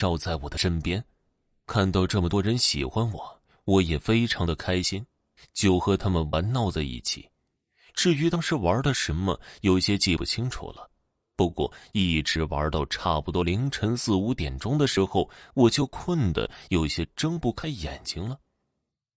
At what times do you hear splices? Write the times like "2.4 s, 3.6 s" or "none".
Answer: none